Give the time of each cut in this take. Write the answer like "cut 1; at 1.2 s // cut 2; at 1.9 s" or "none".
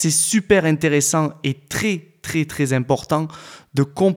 none